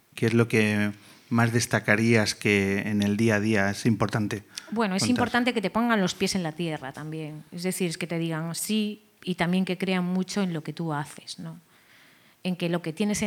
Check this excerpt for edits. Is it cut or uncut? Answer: uncut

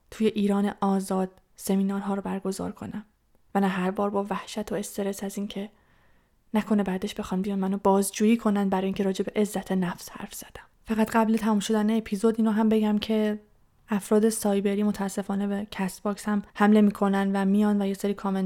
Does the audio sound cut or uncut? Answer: cut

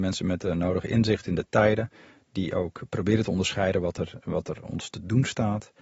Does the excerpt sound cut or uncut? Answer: uncut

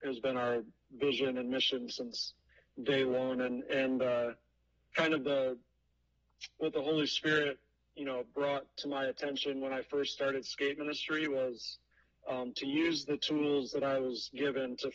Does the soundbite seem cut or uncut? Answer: uncut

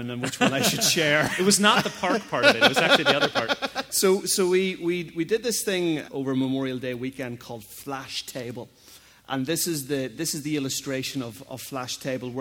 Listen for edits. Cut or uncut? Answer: cut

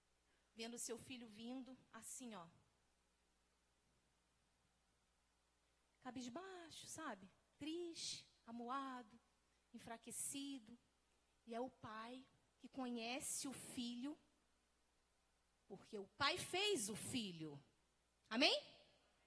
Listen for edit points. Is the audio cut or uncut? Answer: uncut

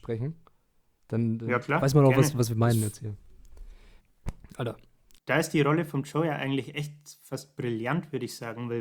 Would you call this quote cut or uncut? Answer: cut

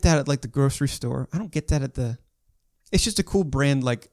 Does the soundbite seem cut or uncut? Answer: uncut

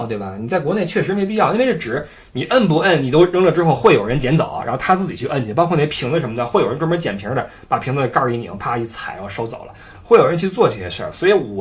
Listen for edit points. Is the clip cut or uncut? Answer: uncut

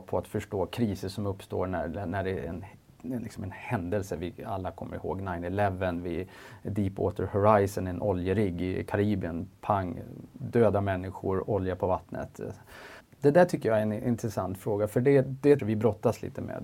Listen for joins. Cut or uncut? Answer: cut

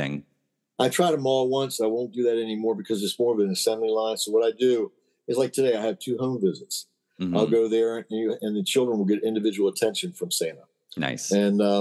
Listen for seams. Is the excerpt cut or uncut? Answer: uncut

